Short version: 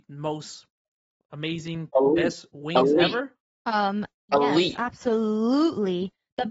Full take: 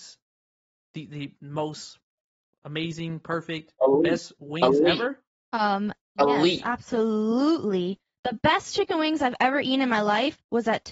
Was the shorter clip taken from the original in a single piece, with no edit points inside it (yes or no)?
no